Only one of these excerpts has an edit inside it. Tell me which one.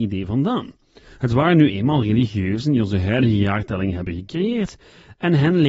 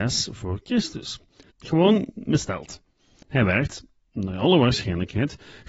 second; 2 cuts; at 1.5 s, 3.2 s

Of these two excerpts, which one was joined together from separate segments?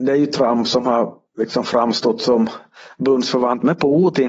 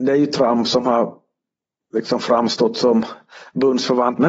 first; 1 cut; at 1.3 s

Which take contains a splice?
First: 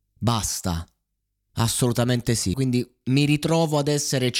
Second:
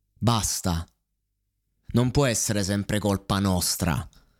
first; 2 cuts; at 1.5 s, 2.5 s

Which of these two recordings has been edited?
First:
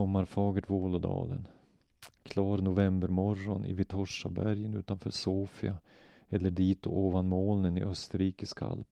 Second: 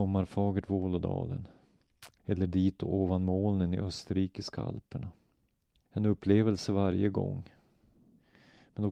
second; 2 cuts; at 2.2 s, 5.9 s

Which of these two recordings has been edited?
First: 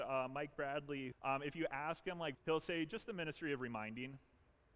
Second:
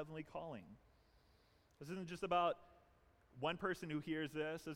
first; 2 cuts; at 1.1 s, 2.3 s

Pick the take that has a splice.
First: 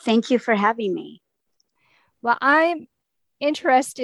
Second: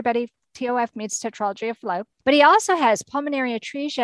second; 1 cut; at 2.1 s

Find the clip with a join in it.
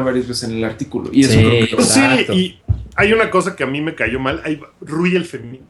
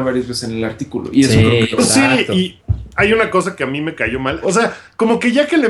second; 1 cut; at 4.4 s

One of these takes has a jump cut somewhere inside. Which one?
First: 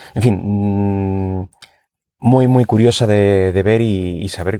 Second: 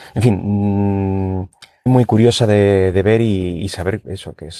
second; 1 cut; at 1.9 s

